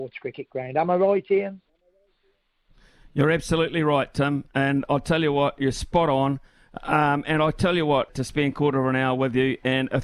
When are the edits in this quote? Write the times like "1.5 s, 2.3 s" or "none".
8.1 s